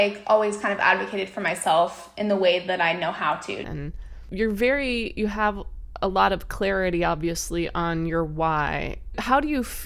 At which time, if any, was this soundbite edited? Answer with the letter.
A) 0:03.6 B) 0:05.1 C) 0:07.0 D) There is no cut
A